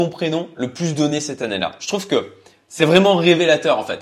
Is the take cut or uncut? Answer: uncut